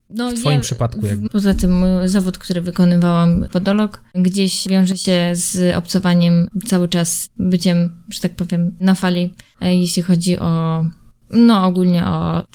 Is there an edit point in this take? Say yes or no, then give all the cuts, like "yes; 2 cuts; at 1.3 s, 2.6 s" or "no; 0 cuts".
yes; 2 cuts; at 1.3 s, 3.5 s